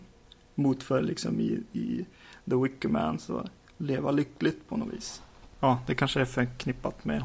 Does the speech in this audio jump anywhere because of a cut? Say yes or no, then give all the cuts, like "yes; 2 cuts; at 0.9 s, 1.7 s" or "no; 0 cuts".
yes; 2 cuts; at 3.6 s, 5.5 s